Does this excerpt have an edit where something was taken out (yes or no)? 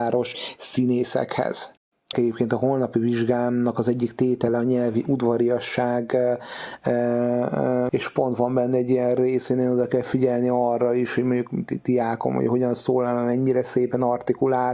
yes